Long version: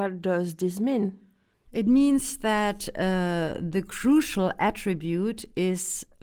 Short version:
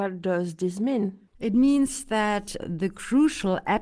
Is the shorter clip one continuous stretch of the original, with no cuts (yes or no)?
no